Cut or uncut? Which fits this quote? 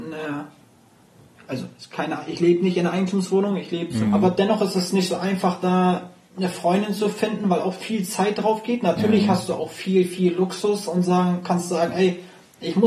cut